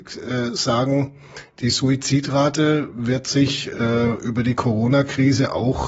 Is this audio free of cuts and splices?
yes; 0 cuts

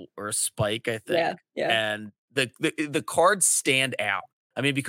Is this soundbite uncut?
yes; 0 cuts

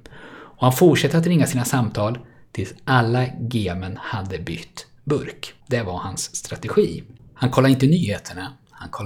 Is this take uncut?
no; 1 cut; at 5.6 s

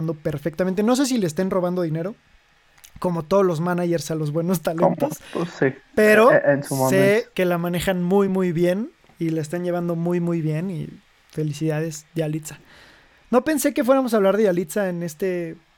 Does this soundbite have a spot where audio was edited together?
no; 0 cuts

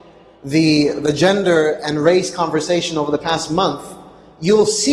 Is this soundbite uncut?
yes; 0 cuts

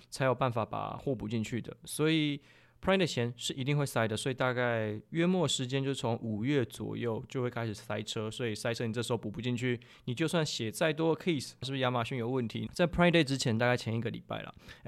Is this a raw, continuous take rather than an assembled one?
no; 2 cuts; at 11.6 s, 12.7 s

